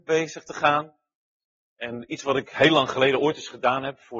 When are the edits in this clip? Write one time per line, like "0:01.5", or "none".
none